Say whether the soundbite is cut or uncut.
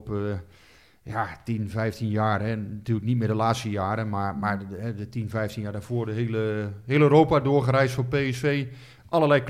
uncut